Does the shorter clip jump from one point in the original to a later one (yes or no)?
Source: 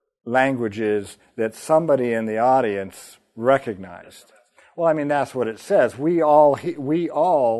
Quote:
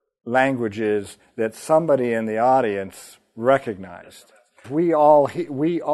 yes